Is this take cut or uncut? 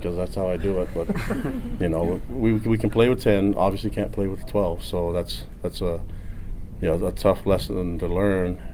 uncut